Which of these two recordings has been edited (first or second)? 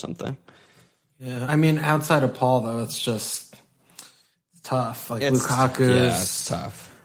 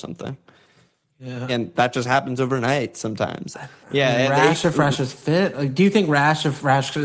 second